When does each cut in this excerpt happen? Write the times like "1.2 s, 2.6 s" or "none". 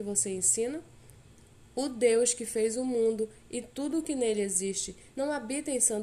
1.7 s, 5.1 s